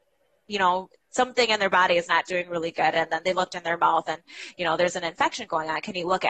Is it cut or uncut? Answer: uncut